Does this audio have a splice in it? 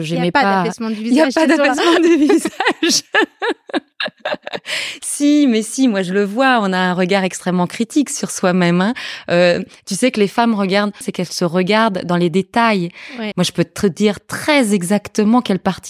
yes; 2 cuts; at 11.0 s, 13.3 s

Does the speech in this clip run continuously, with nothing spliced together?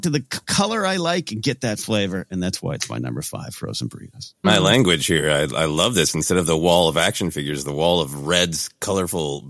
no; 1 cut; at 4.4 s

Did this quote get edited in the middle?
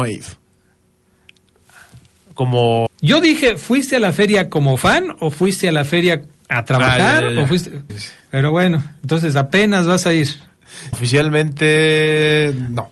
yes; 3 cuts; at 2.9 s, 7.9 s, 10.9 s

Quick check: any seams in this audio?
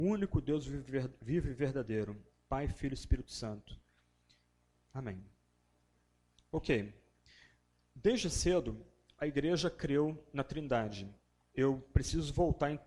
yes; 2 cuts; at 4.7 s, 11.4 s

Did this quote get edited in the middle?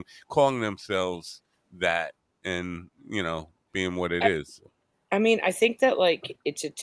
no; 0 cuts

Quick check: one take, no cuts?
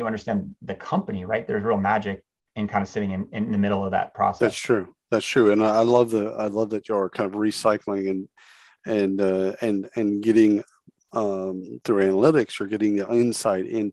yes; 0 cuts

